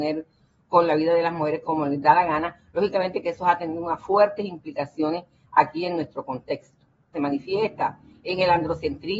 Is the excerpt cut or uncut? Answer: cut